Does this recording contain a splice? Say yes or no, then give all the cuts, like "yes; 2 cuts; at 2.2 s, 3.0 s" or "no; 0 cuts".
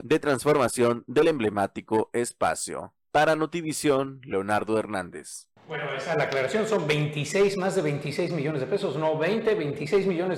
yes; 1 cut; at 5.6 s